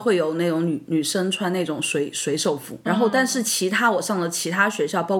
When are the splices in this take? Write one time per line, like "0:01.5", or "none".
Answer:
none